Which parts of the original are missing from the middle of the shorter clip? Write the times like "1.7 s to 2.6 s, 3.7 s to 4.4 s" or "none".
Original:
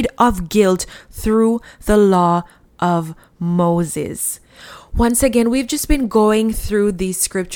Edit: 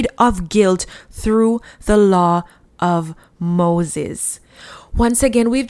none